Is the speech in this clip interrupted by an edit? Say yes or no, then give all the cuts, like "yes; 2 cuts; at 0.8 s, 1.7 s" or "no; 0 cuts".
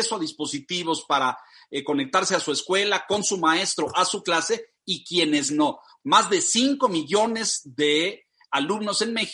yes; 1 cut; at 6.0 s